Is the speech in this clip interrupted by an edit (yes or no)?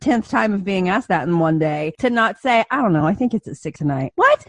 no